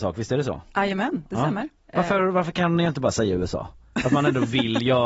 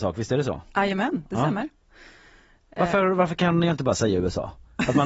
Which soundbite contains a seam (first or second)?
first